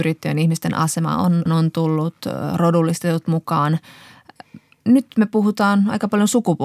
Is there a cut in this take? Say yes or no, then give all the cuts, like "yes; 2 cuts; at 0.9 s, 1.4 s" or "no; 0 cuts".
yes; 1 cut; at 1.5 s